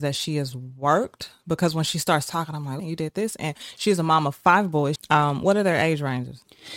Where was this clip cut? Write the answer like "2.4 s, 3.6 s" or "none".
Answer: 2.8 s, 5.0 s